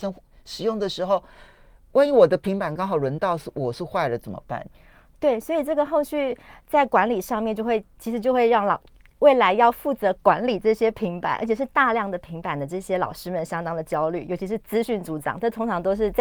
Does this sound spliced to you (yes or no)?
no